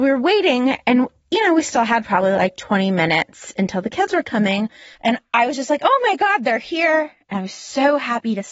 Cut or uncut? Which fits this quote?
cut